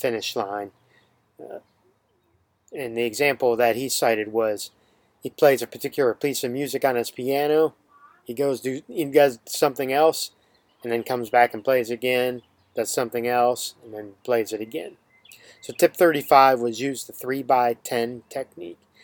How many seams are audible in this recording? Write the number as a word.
zero